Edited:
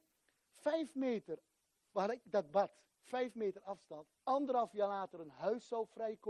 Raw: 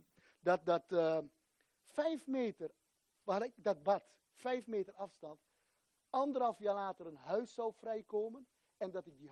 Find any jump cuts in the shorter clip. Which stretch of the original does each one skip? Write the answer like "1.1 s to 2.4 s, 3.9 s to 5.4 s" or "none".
5.5 s to 6.0 s